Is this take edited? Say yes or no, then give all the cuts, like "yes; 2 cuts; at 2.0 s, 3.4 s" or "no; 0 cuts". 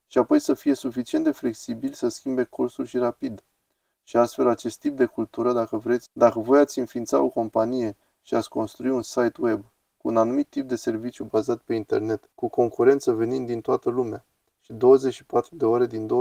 yes; 2 cuts; at 6.1 s, 12.3 s